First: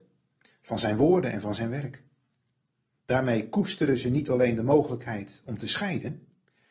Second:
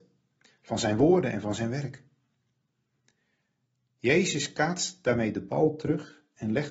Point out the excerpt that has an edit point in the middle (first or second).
first